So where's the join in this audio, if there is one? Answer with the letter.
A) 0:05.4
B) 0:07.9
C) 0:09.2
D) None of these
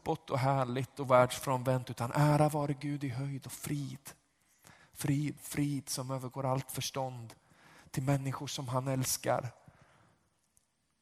A